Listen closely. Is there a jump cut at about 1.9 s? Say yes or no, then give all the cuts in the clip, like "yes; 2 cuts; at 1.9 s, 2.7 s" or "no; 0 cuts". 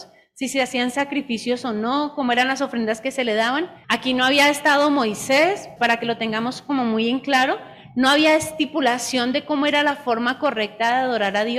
no; 2 cuts; at 3.8 s, 5.8 s